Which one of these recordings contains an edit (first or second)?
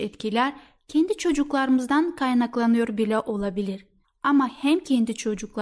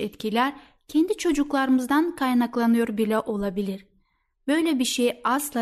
first